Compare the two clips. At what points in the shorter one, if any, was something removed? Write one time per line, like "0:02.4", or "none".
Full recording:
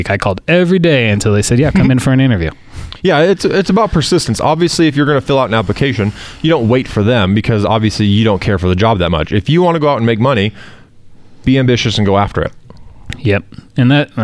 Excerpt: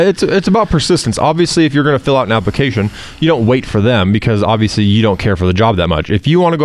none